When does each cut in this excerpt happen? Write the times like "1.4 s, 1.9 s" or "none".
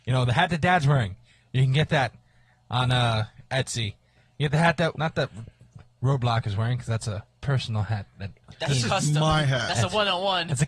4.9 s